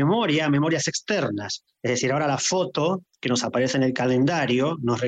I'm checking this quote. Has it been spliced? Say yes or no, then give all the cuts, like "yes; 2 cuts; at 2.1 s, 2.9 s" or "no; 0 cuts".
no; 0 cuts